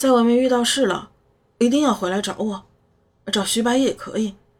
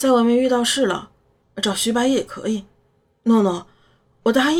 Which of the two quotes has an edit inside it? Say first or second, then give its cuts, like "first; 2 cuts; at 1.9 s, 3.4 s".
second; 1 cut; at 1.4 s